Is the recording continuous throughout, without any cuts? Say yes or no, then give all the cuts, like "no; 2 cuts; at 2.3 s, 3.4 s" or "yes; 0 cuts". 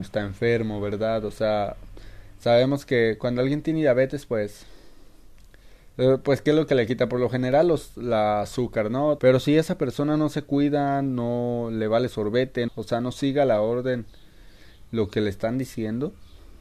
no; 2 cuts; at 9.2 s, 12.7 s